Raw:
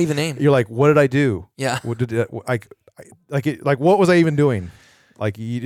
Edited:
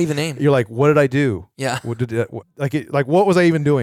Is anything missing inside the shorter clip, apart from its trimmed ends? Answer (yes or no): yes